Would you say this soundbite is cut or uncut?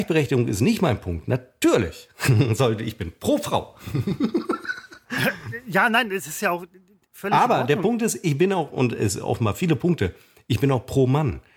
uncut